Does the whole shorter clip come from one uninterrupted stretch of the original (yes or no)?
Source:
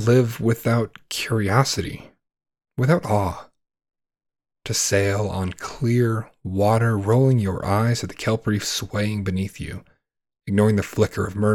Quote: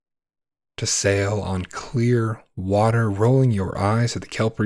yes